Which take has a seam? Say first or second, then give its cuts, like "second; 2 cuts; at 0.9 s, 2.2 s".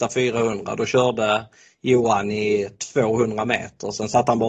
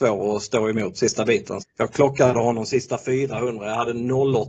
second; 1 cut; at 1.6 s